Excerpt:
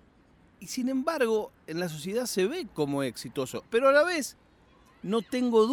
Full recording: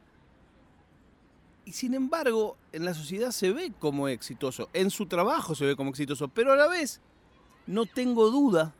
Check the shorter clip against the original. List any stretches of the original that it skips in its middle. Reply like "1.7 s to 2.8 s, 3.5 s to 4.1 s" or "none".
4.7 s to 6.3 s